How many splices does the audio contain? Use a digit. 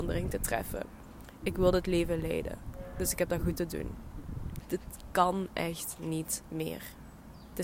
2